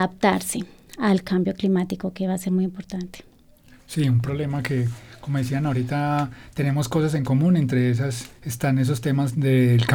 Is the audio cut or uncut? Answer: uncut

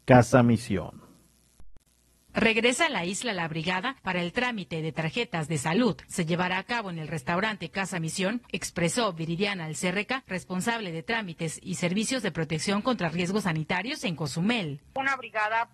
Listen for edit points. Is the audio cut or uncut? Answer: cut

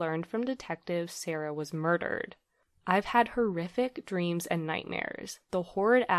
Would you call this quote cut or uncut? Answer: uncut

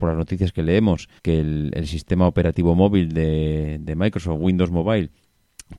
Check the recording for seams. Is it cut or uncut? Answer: cut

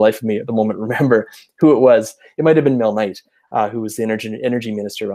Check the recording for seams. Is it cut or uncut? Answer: uncut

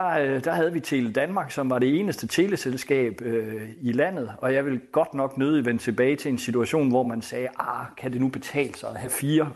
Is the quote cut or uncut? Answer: uncut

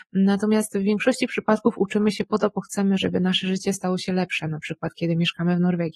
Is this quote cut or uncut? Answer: uncut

